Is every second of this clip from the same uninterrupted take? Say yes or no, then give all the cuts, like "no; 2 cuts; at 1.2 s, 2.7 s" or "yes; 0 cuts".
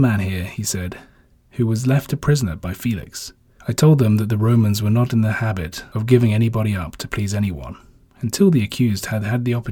no; 1 cut; at 3.6 s